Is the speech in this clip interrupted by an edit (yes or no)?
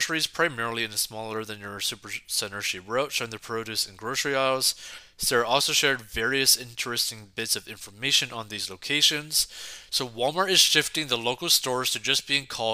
no